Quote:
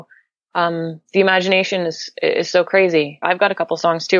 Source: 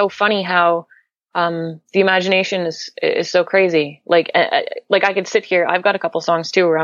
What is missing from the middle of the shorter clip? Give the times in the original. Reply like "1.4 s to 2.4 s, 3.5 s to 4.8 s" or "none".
4.0 s to 5.7 s